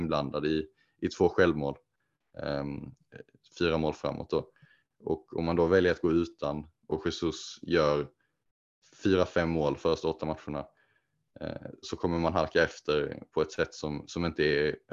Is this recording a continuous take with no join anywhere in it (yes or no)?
no